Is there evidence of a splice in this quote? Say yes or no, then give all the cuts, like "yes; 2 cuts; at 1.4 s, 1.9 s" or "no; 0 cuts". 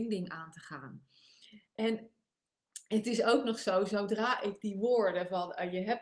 no; 0 cuts